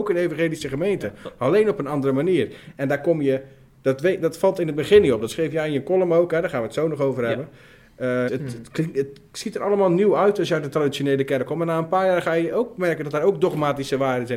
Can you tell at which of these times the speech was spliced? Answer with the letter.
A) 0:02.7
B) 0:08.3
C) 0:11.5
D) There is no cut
B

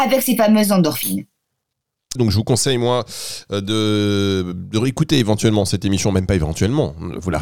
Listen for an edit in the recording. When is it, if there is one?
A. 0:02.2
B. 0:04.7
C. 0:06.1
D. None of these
A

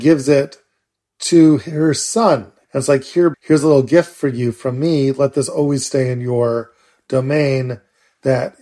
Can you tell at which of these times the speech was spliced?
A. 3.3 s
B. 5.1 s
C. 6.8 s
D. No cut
A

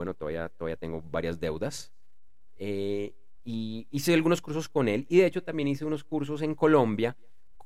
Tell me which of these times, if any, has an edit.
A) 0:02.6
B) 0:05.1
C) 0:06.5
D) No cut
A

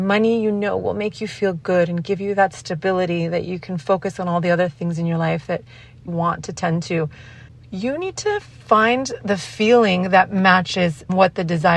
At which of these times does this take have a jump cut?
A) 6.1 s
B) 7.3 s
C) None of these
A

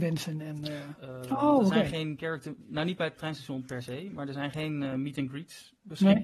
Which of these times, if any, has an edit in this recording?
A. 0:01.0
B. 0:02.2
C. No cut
A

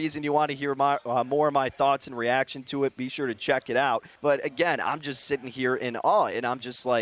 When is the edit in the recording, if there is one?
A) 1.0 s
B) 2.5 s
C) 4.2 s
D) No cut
C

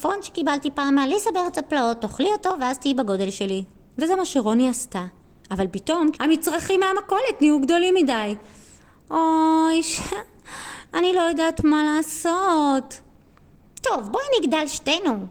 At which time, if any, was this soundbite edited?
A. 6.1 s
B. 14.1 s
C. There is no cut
A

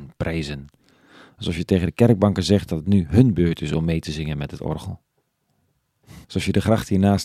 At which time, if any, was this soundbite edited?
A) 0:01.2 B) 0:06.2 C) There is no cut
B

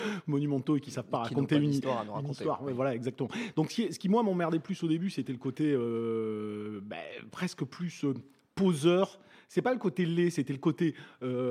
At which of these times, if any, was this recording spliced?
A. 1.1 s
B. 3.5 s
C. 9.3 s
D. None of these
D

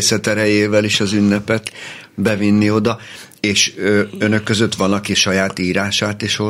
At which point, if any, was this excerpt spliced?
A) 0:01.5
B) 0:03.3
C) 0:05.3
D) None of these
D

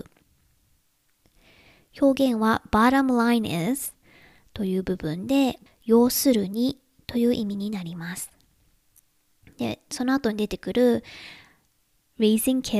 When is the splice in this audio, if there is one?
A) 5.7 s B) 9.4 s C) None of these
A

